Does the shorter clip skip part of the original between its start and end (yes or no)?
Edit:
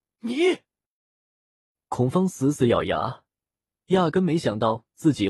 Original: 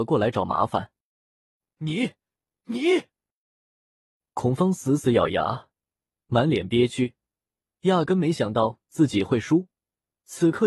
yes